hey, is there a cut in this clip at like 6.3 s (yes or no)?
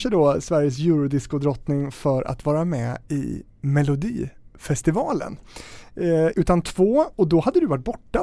yes